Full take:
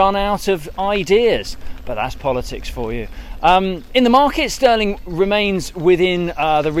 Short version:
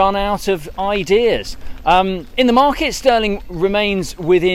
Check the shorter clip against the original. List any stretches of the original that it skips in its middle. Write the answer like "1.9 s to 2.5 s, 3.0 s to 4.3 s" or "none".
1.8 s to 3.4 s